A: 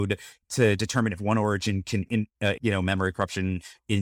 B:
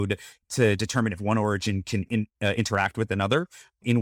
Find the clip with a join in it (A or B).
A